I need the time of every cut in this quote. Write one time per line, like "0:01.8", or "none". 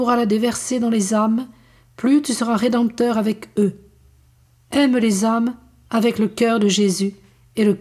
none